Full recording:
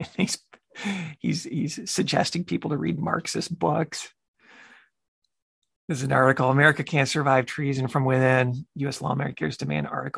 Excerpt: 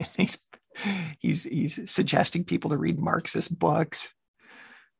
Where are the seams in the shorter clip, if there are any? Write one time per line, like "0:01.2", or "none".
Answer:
none